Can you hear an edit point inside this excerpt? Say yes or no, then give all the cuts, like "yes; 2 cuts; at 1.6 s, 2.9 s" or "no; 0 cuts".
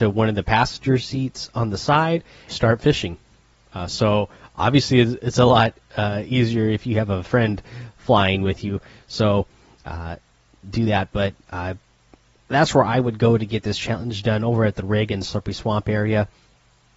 yes; 1 cut; at 2.5 s